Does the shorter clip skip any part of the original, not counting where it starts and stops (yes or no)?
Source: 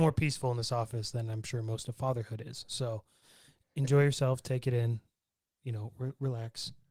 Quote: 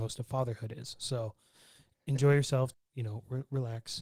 yes